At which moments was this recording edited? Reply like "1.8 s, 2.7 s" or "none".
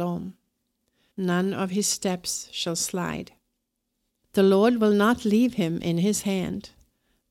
1.1 s, 4.2 s